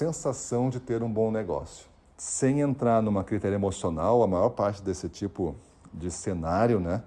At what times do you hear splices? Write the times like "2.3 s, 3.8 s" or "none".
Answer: 2.0 s